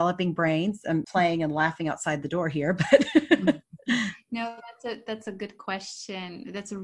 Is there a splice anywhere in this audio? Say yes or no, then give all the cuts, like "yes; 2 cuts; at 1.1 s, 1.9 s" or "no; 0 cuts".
yes; 1 cut; at 1.0 s